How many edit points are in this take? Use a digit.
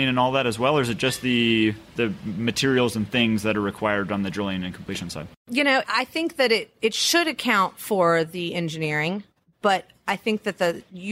0